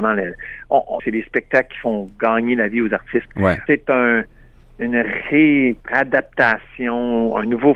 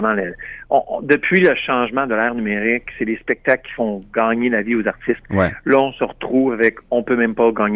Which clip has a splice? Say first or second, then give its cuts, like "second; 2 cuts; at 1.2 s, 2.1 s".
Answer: first; 3 cuts; at 1.0 s, 3.7 s, 5.8 s